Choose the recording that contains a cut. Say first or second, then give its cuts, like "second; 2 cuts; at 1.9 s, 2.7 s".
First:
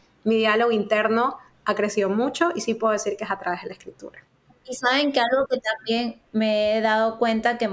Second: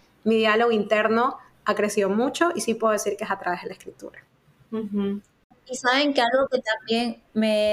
first; 1 cut; at 4.5 s